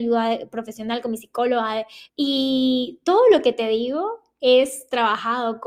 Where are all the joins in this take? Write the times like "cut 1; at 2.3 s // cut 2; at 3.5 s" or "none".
cut 1; at 2.1 s